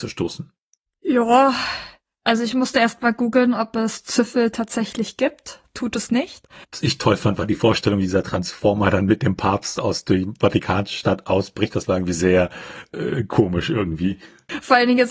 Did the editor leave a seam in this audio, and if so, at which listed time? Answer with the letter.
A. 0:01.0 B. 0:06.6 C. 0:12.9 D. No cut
B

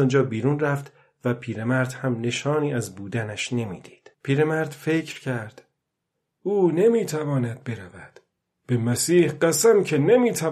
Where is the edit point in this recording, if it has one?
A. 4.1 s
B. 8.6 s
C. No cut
A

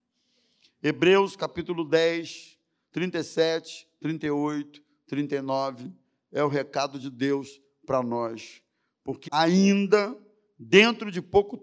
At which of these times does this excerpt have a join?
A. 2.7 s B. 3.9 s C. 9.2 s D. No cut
C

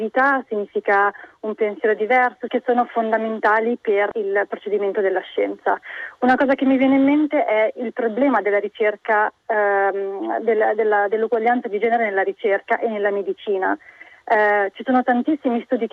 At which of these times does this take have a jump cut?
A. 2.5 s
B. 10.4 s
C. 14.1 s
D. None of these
A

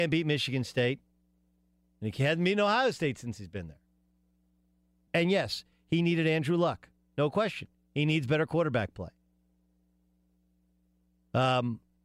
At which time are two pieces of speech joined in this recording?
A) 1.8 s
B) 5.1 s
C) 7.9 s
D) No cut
B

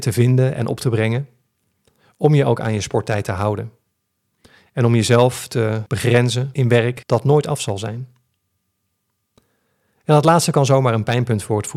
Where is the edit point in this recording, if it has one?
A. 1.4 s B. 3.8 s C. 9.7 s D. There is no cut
D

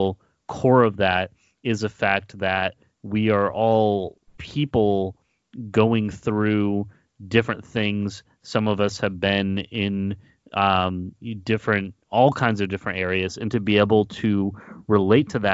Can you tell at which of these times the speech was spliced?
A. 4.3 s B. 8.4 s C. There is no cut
A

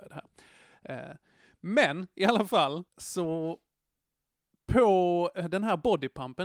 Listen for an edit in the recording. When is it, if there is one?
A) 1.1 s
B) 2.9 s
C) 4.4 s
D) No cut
B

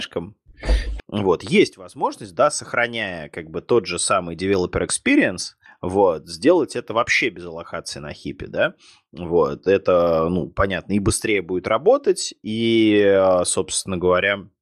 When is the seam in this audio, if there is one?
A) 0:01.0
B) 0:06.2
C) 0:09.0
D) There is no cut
A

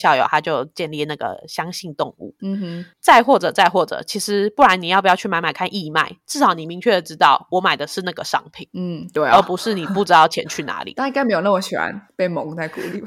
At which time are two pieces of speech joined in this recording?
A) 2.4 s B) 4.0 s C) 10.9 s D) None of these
A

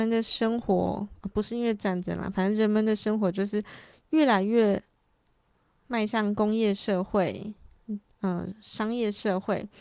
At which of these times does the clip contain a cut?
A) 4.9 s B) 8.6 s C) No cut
C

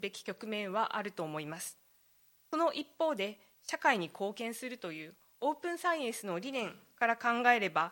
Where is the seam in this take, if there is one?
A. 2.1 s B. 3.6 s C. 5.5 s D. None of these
B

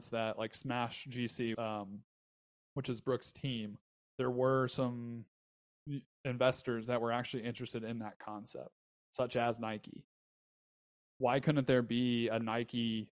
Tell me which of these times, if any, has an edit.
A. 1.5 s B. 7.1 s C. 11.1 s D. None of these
A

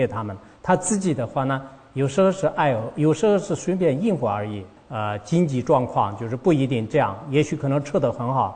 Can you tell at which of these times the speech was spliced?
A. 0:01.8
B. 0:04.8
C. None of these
B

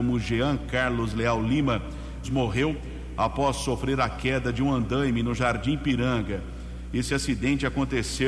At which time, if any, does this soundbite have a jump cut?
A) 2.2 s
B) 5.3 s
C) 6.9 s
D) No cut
A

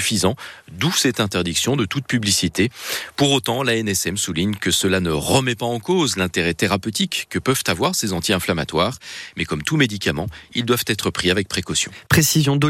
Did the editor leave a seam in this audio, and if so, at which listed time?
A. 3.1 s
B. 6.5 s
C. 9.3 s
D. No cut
D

